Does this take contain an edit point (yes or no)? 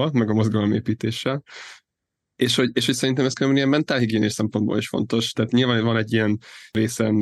no